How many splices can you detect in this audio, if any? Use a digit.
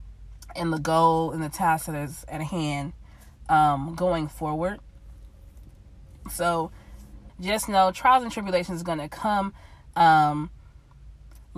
2